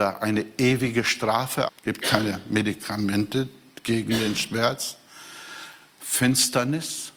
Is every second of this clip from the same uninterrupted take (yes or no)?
no